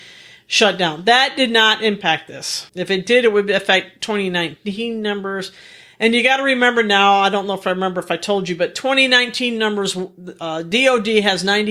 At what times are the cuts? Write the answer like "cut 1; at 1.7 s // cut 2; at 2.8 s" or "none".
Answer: cut 1; at 2.7 s

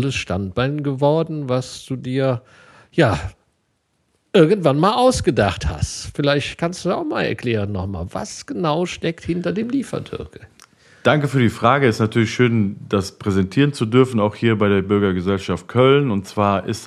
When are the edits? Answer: none

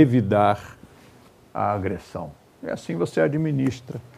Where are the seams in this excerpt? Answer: none

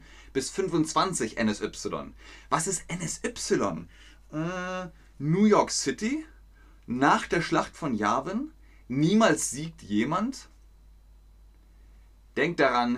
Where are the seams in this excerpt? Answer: none

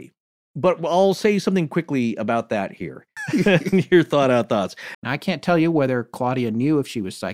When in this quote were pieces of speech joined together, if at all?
cut 1; at 3.2 s // cut 2; at 4.9 s

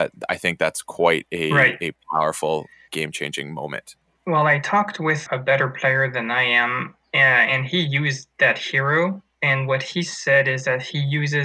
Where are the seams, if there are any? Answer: cut 1; at 2.9 s // cut 2; at 5.3 s

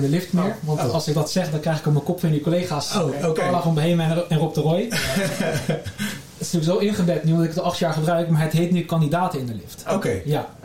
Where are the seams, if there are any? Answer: none

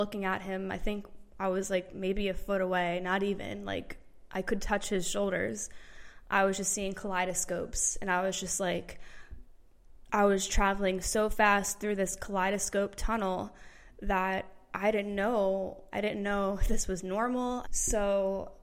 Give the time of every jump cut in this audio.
cut 1; at 15.9 s // cut 2; at 17.6 s

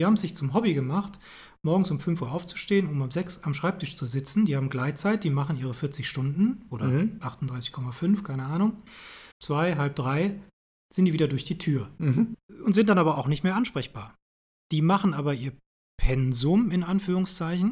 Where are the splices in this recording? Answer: cut 1; at 9.3 s

